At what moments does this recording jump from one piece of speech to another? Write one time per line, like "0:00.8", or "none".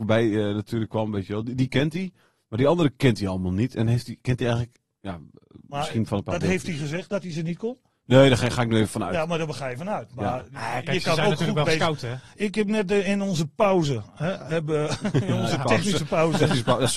none